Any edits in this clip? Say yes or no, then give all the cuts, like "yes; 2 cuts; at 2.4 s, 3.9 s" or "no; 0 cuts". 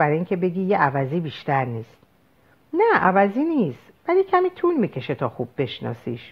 no; 0 cuts